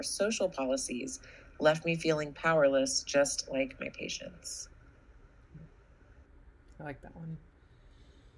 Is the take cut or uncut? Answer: uncut